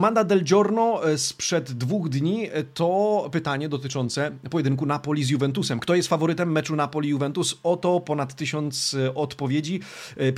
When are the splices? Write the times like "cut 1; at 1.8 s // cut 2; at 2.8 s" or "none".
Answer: none